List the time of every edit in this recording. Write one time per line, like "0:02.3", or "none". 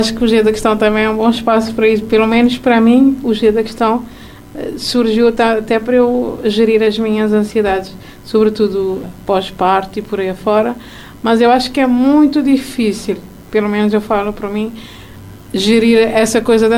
0:09.0